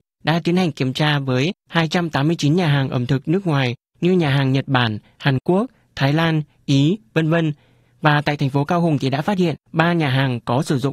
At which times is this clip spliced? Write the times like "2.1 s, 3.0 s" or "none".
none